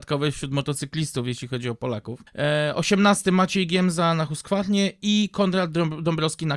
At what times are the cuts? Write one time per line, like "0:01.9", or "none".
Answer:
0:02.3